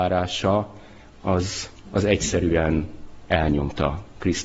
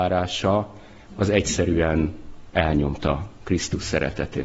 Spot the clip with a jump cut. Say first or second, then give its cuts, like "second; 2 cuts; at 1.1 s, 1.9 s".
second; 1 cut; at 1.1 s